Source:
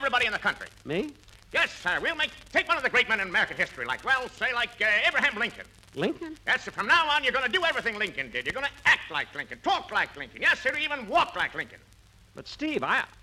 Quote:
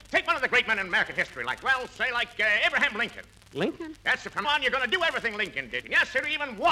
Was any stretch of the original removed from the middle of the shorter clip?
yes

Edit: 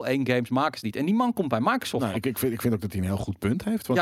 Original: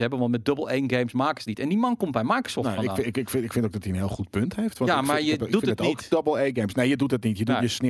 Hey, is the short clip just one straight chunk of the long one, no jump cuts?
no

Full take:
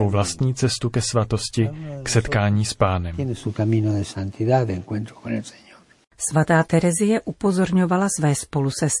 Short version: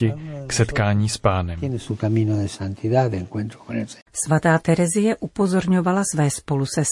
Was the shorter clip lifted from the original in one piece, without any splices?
no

